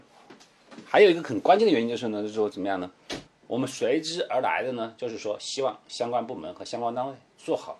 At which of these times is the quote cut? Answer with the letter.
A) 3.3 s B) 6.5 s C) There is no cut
A